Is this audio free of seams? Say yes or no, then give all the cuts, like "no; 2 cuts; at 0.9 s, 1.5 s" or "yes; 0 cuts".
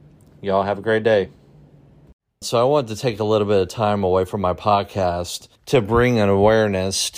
no; 2 cuts; at 2.4 s, 5.6 s